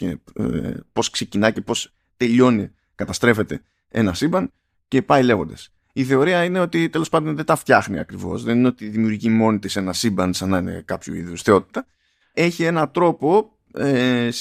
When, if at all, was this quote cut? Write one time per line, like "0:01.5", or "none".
0:12.3